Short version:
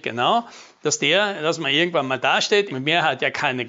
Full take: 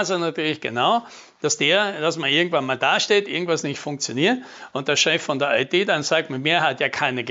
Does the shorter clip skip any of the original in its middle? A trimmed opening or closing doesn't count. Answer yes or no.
yes